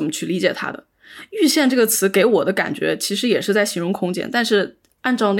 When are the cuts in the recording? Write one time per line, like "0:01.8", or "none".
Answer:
none